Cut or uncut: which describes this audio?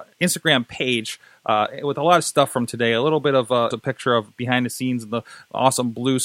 cut